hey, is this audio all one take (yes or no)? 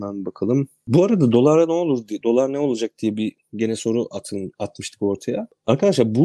yes